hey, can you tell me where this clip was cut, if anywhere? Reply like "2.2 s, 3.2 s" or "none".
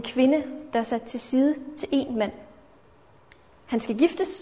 3.5 s